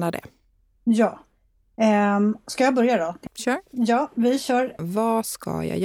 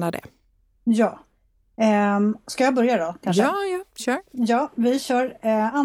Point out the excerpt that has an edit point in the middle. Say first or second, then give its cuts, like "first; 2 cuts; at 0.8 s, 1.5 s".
first; 2 cuts; at 3.3 s, 4.8 s